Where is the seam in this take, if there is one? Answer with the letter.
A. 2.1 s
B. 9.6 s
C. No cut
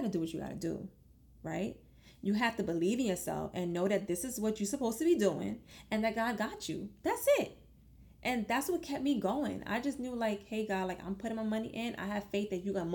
C